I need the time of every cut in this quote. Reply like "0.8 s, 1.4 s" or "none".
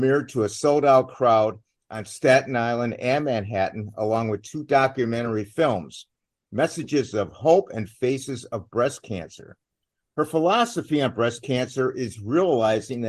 none